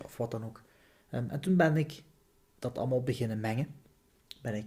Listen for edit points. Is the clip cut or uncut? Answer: uncut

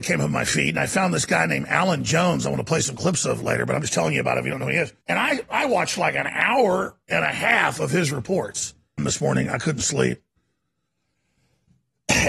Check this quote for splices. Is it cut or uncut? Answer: cut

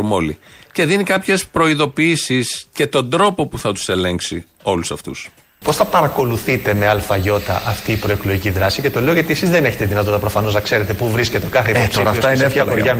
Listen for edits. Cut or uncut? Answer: cut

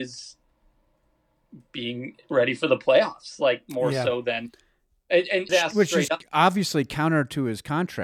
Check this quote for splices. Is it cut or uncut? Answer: cut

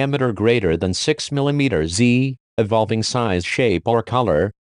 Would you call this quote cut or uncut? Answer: uncut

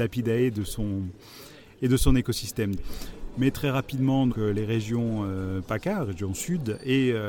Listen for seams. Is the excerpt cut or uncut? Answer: cut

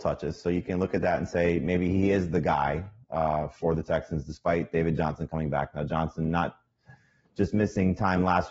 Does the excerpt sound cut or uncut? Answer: uncut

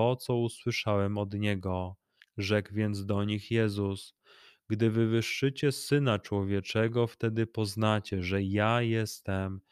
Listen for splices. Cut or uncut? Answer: cut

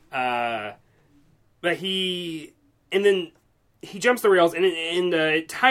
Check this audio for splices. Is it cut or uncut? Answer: uncut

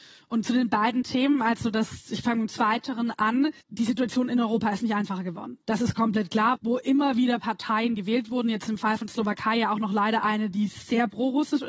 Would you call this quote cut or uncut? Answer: cut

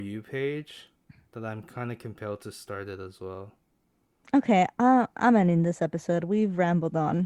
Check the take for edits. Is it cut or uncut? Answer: cut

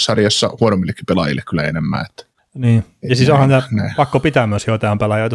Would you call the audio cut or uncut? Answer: uncut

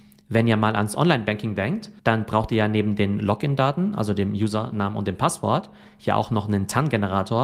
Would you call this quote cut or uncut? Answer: cut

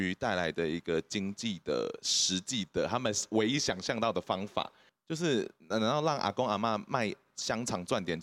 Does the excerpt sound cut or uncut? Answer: cut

